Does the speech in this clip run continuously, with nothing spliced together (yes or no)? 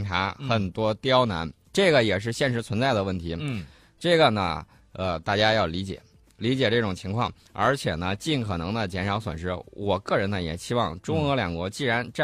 yes